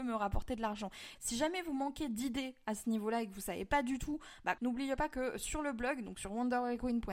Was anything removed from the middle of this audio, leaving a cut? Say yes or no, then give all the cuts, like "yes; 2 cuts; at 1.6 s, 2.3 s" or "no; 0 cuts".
yes; 2 cuts; at 1.2 s, 4.6 s